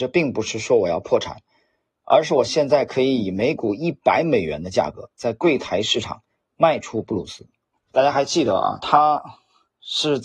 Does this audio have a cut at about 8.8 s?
yes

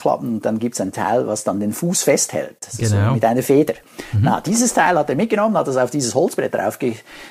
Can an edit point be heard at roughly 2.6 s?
no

